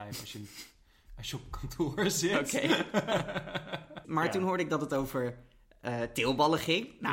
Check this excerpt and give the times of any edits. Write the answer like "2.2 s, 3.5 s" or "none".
4.0 s